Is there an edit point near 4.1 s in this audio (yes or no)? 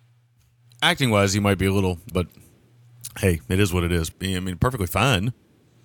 yes